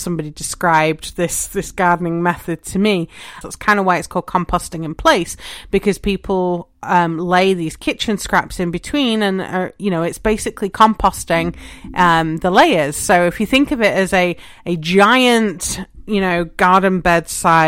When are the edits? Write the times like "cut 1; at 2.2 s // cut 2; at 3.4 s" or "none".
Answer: cut 1; at 3.4 s